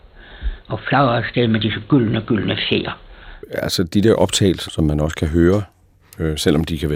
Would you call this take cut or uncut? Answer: cut